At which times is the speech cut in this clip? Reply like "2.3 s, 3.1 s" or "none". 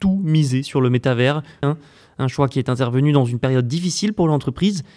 1.6 s